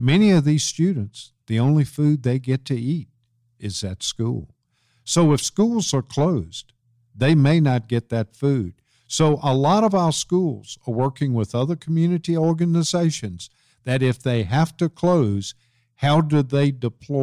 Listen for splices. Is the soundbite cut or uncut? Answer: uncut